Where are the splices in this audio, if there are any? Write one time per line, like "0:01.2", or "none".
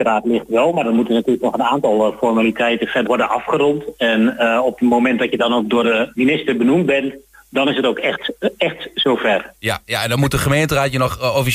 0:03.1